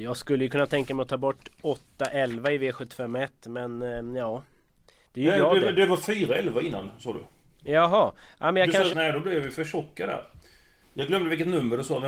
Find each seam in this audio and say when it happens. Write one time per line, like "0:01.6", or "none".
0:08.9
0:10.8